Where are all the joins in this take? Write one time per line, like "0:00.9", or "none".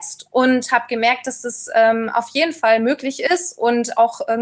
none